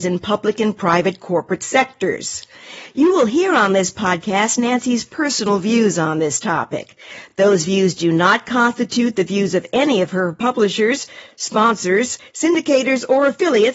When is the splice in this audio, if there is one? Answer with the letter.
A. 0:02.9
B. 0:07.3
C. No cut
C